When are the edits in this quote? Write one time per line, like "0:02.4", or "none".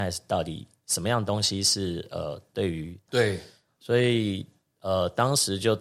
0:03.1